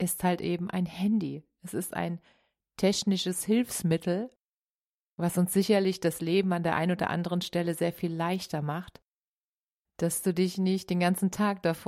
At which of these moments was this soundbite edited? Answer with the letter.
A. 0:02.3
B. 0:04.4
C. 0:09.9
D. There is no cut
C